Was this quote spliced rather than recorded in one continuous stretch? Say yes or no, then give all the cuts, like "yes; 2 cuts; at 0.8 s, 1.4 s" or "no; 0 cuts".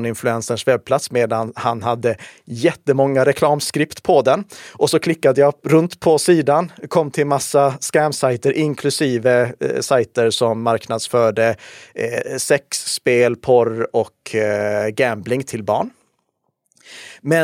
no; 0 cuts